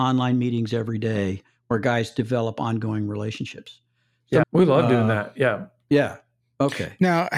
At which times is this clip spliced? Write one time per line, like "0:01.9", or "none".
0:04.4